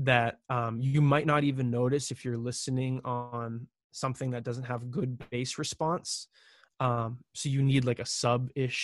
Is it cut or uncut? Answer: uncut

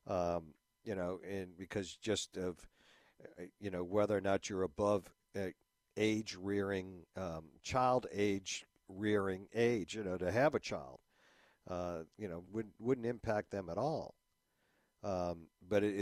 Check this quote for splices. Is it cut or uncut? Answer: cut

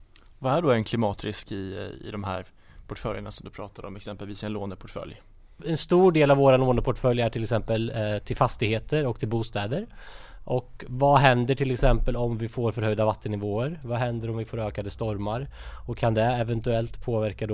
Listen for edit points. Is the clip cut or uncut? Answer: uncut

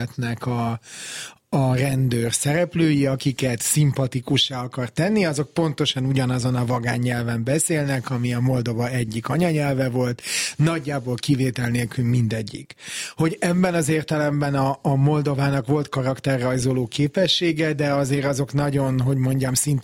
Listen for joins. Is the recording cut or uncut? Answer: uncut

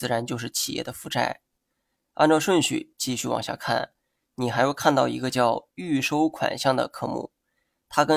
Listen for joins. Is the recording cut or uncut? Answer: cut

